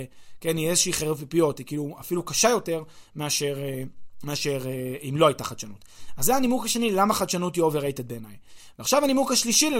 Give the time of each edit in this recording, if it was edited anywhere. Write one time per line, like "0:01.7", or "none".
none